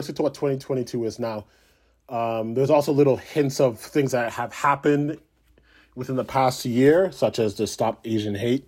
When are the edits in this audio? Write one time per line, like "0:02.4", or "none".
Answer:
none